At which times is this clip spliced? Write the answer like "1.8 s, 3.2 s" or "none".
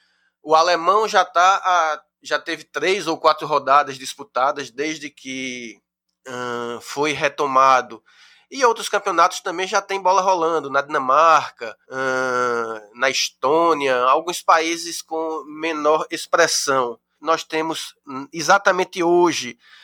11.8 s, 17.1 s